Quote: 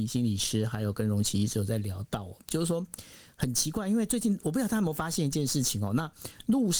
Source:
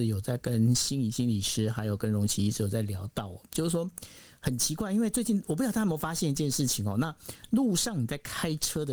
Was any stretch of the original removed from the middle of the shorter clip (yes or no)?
no